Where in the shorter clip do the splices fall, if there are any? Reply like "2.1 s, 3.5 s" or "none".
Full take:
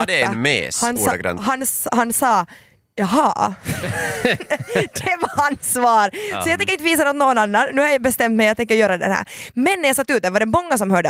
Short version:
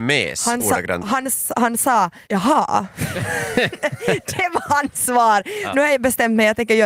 2.2 s, 5.7 s